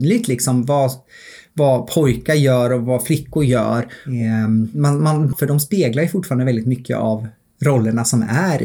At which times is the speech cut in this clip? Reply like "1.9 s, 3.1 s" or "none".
5.3 s